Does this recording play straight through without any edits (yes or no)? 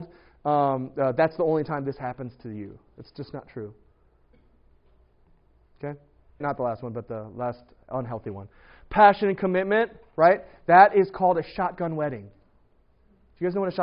no